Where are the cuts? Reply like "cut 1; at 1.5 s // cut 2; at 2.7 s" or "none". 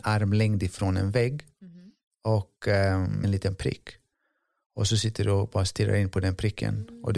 cut 1; at 3.2 s